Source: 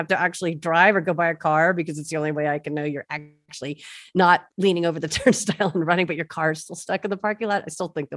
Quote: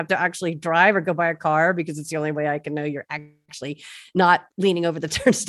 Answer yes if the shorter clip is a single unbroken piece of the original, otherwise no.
yes